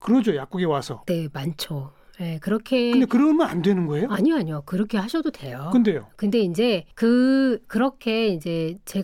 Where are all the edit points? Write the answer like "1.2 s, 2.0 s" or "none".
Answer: 6.9 s